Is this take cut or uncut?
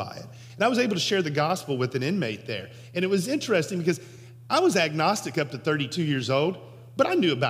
uncut